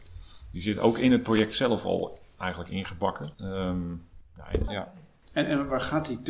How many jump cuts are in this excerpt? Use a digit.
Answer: 2